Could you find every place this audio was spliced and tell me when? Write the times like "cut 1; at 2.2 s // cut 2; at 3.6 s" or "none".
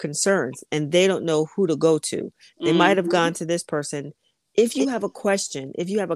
none

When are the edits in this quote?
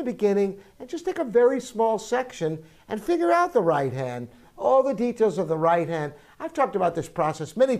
none

